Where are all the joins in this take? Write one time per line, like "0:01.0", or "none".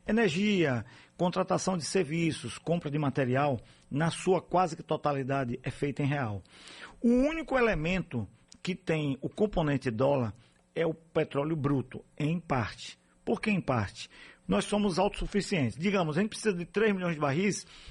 0:14.4